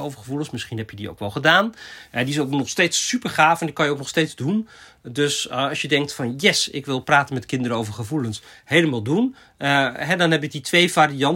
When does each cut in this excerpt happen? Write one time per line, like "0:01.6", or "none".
none